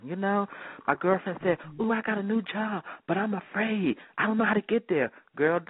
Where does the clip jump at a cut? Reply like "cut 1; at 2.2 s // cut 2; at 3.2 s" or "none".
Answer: none